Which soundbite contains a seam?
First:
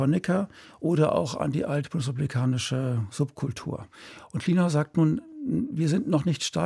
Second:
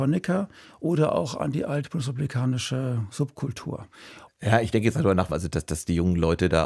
second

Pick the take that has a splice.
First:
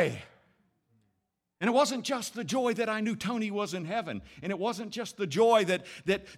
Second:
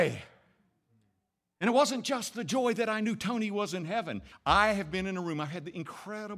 second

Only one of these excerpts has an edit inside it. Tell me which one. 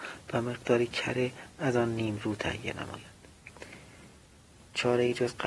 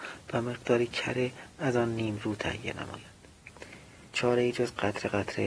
second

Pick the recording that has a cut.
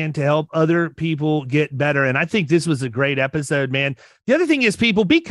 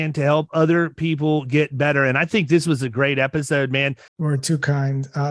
second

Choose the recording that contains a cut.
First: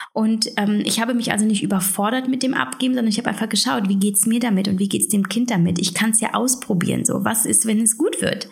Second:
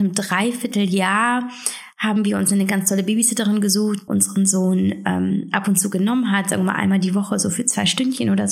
second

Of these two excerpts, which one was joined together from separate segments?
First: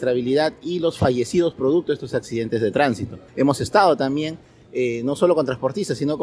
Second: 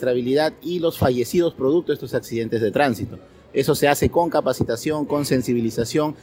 first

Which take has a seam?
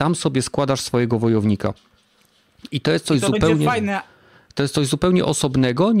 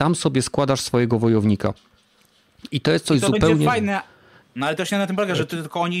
second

